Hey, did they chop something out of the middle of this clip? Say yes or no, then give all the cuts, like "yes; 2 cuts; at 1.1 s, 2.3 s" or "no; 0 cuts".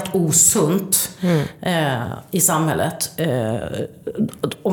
no; 0 cuts